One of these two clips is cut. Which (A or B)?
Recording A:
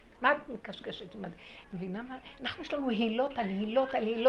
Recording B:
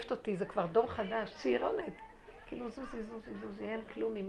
A